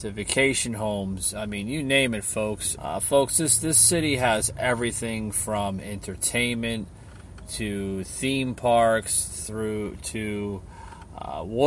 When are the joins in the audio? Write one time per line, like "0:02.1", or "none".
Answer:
0:02.8